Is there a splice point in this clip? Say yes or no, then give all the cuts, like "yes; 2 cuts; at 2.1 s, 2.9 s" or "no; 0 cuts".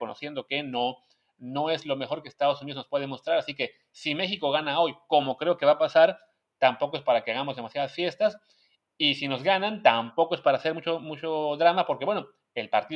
no; 0 cuts